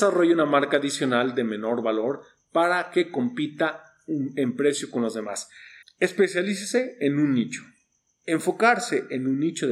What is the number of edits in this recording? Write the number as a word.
one